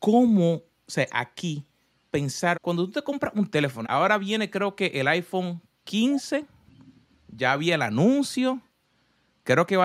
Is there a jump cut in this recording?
yes; 2 cuts; at 2.5 s, 3.8 s

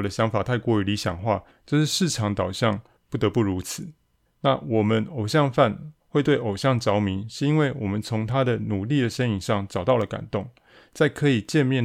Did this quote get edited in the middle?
yes; 2 cuts; at 1.5 s, 4.3 s

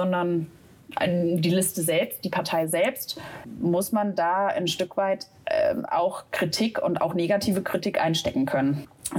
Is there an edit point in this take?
no; 0 cuts

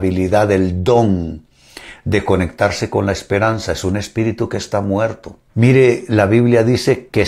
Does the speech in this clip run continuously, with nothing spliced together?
no; 1 cut; at 5.5 s

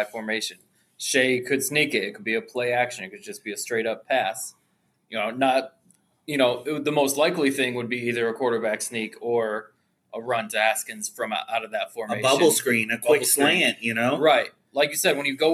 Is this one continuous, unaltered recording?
yes; 0 cuts

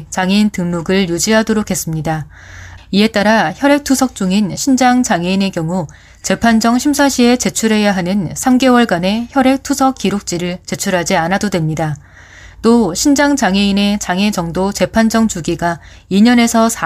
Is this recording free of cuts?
no; 1 cut; at 2.8 s

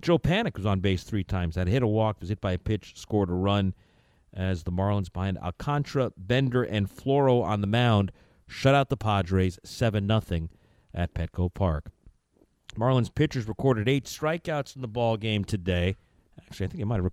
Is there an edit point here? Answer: no; 0 cuts

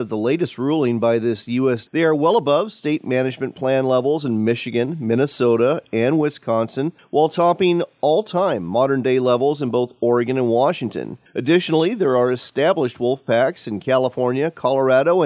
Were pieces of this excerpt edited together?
yes; 1 cut; at 1.9 s

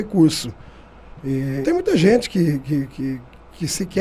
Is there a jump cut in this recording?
yes; 1 cut; at 1.6 s

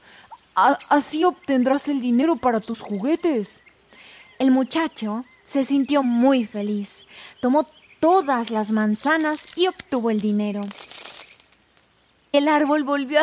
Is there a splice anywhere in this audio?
no; 0 cuts

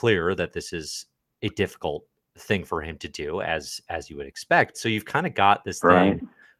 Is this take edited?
yes; 1 cut; at 4.7 s

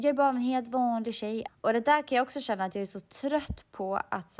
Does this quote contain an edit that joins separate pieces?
yes; 1 cut; at 1.5 s

